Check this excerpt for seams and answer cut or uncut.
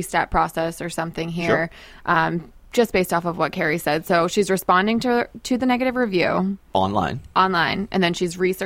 uncut